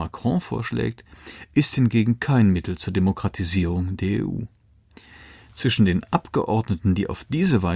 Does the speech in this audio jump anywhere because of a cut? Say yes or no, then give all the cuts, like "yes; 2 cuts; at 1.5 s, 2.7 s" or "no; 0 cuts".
no; 0 cuts